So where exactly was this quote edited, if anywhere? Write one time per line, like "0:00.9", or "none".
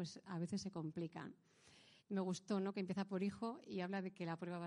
0:02.0